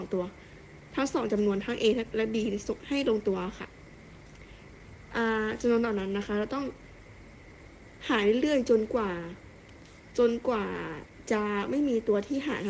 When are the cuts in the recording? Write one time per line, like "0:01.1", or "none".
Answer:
none